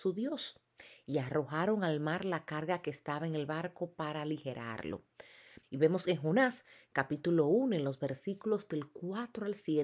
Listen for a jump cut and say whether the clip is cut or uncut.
cut